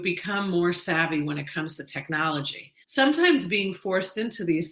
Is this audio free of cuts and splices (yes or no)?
no